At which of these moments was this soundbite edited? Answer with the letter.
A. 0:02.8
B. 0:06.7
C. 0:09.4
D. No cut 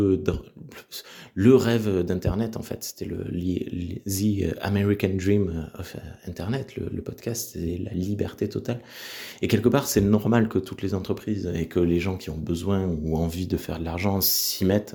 D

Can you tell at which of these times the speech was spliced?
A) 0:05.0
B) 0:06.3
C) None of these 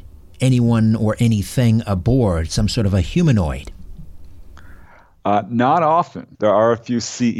B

